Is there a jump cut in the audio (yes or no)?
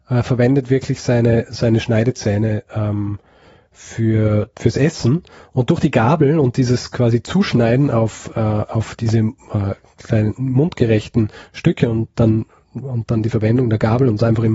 no